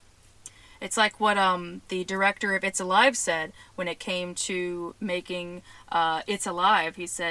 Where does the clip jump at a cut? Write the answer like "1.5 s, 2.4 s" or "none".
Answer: none